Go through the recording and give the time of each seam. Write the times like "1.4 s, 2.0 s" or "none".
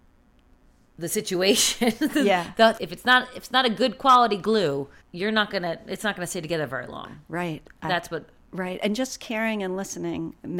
2.8 s, 5.0 s